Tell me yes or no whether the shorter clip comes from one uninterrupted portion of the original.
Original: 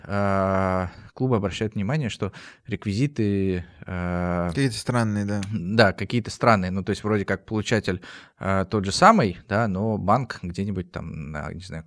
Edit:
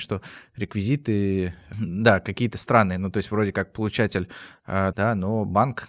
no